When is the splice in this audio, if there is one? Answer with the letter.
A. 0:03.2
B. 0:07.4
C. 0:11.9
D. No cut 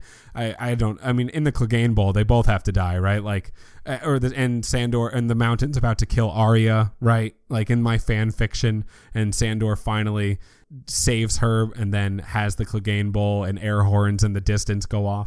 D